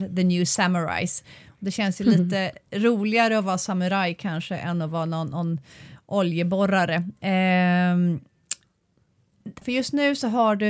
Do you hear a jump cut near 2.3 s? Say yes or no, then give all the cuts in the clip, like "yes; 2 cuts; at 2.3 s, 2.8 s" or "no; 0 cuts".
no; 1 cut; at 9.6 s